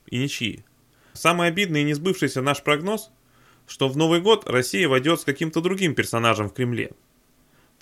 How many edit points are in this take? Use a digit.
0